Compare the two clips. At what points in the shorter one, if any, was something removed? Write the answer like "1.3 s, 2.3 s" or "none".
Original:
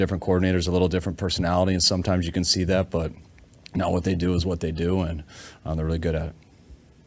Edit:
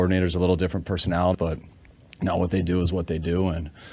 1.3 s